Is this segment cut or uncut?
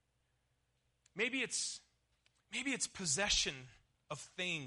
uncut